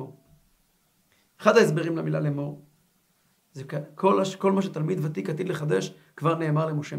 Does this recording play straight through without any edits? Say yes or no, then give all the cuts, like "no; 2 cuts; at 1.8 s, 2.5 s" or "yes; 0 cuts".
yes; 0 cuts